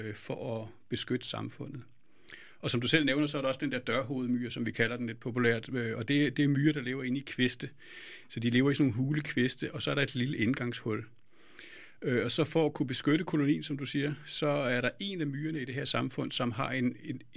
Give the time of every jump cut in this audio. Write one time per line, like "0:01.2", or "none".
none